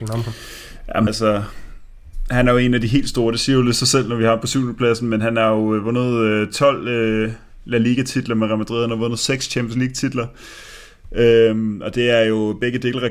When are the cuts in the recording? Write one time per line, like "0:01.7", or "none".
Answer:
0:01.1